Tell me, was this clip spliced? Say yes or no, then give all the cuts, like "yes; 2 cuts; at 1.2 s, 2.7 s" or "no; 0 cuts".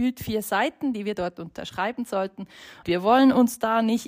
yes; 1 cut; at 2.8 s